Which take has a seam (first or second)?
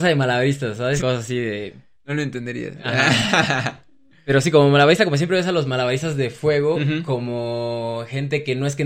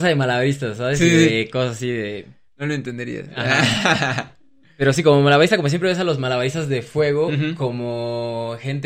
first